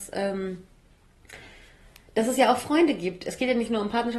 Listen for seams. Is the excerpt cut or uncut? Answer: uncut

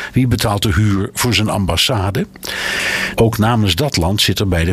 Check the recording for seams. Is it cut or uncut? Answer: cut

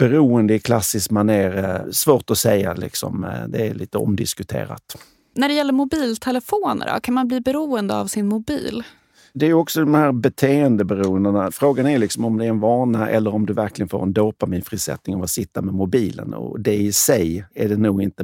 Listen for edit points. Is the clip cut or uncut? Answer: uncut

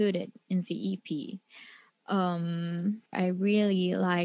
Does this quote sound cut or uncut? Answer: cut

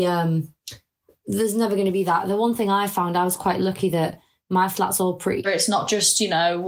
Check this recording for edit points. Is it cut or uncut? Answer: cut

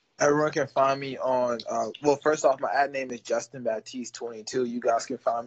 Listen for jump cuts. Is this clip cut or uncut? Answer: uncut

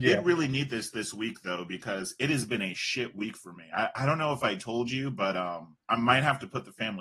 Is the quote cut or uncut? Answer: cut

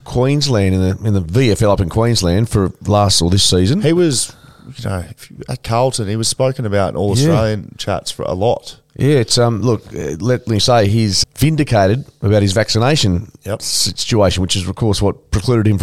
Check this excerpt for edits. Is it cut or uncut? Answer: cut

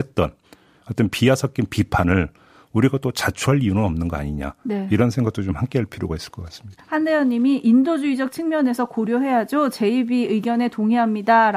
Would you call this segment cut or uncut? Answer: cut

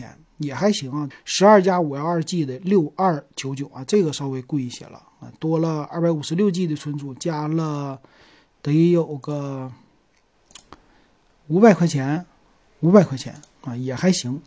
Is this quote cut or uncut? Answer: cut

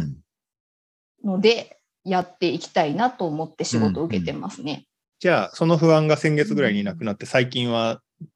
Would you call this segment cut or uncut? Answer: cut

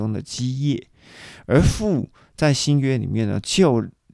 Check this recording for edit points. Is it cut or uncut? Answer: uncut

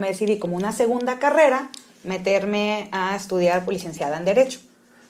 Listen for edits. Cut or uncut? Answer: uncut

